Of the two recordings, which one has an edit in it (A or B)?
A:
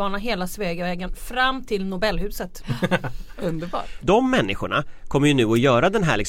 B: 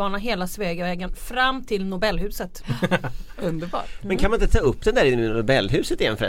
A